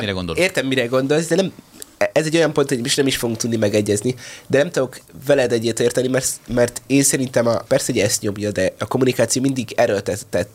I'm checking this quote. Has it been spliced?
yes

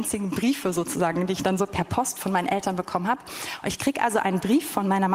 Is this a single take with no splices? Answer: yes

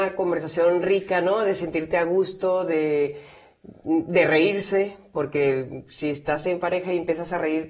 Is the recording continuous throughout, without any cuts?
yes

